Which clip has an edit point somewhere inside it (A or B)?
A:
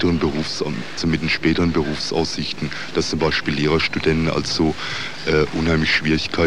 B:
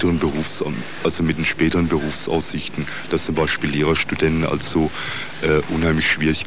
A